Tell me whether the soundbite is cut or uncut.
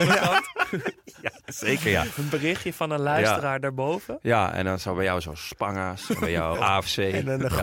cut